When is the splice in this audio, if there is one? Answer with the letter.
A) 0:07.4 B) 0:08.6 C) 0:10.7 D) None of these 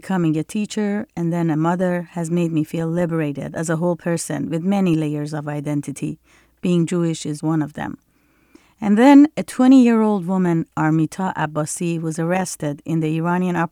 A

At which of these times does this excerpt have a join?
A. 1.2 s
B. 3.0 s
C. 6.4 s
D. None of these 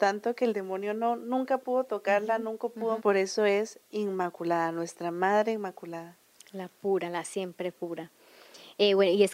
B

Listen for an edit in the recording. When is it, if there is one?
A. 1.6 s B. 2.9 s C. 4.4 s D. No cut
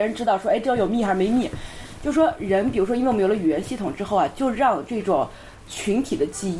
D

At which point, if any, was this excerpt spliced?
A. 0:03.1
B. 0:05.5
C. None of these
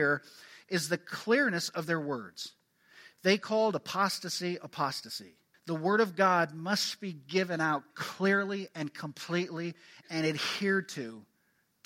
B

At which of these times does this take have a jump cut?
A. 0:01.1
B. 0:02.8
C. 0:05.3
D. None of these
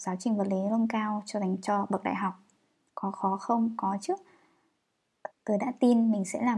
C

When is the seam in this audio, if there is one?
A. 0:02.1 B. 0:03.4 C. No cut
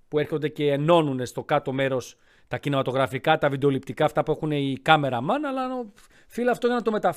C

